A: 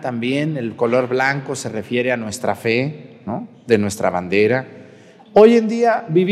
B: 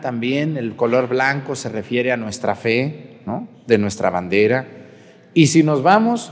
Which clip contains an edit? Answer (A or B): A